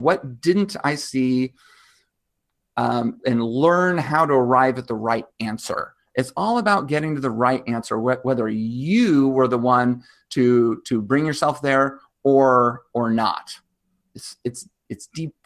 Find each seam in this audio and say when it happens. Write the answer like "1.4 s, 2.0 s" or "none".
3.2 s